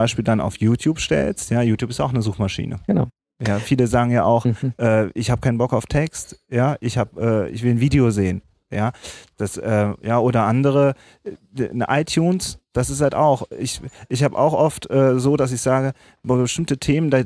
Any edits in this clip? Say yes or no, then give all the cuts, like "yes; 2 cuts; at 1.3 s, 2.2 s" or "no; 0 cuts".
no; 0 cuts